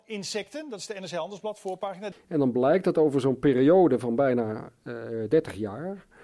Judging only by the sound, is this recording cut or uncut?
cut